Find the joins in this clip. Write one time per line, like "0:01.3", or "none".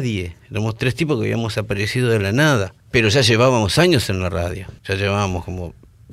0:02.8
0:04.8